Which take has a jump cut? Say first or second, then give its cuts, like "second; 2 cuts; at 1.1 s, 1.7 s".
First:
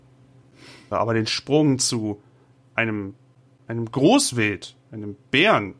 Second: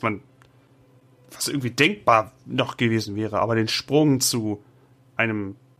first; 1 cut; at 0.9 s